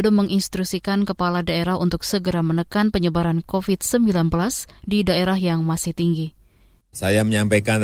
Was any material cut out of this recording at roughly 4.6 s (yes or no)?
no